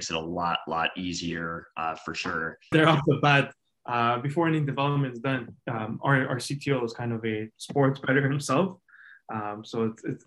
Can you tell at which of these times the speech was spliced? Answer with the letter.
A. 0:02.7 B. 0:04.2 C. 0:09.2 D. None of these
A